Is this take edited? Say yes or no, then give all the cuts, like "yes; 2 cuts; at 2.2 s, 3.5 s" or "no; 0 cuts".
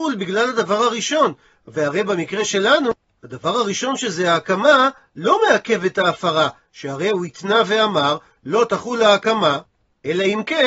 no; 0 cuts